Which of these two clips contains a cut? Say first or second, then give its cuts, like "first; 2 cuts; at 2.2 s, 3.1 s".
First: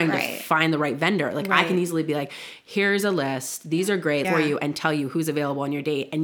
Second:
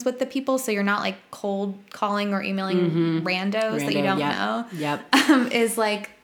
first; 1 cut; at 4.2 s